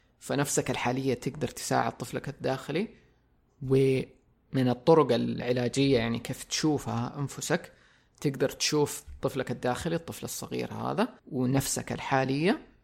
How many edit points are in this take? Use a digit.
2